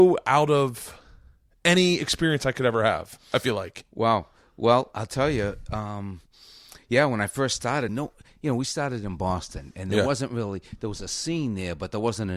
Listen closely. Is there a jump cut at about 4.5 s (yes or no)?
no